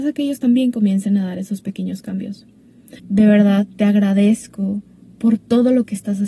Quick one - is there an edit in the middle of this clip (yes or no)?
yes